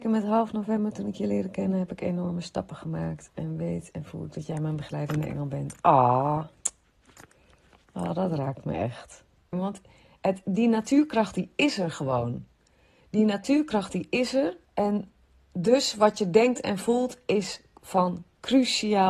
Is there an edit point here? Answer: yes; 2 cuts; at 9.5 s, 14.7 s

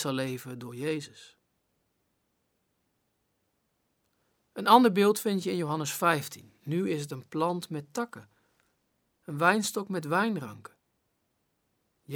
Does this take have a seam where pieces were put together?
no; 0 cuts

